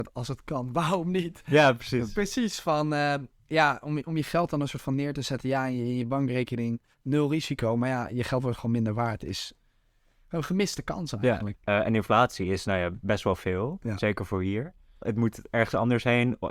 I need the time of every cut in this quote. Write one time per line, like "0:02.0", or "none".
0:11.5
0:15.0